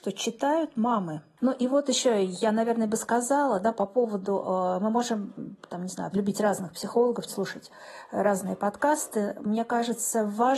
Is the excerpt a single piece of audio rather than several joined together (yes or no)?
no